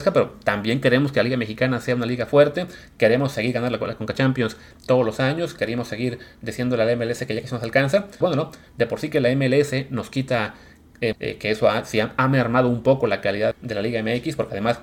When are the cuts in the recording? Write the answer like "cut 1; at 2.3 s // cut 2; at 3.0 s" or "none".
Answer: cut 1; at 8.2 s // cut 2; at 11.1 s // cut 3; at 13.5 s